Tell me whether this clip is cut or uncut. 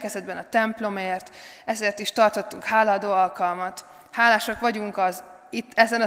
uncut